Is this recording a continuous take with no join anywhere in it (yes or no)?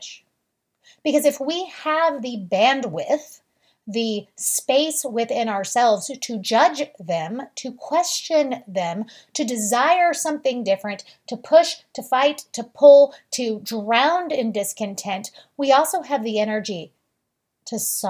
yes